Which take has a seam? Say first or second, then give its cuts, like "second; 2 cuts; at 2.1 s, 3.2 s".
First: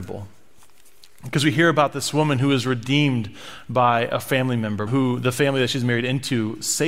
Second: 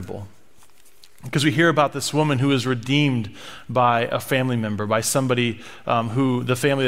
first; 1 cut; at 4.9 s